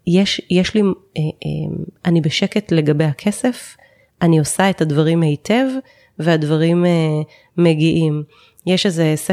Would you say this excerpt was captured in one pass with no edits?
yes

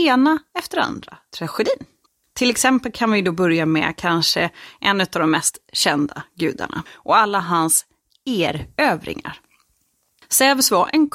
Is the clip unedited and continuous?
no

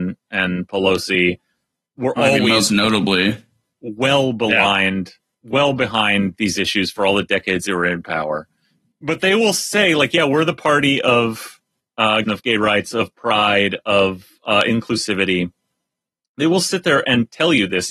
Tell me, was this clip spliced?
yes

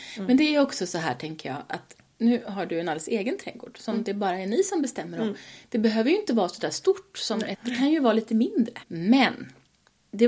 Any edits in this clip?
yes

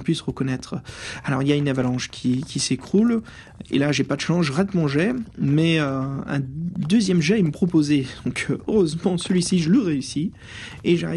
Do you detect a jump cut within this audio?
no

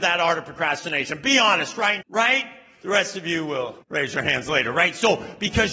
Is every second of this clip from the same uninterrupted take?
no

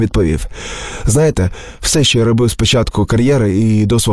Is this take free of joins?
yes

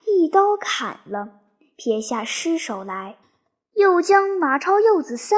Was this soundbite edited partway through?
no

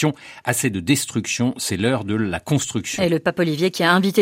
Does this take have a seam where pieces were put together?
no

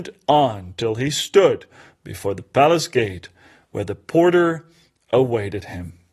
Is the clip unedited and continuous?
yes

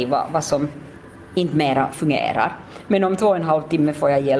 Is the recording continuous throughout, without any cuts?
no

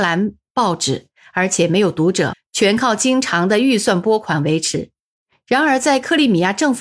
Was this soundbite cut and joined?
yes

